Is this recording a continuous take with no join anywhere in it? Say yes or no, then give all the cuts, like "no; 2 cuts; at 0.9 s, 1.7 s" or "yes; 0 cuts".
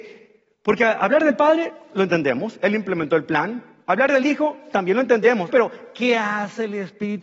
no; 1 cut; at 5.5 s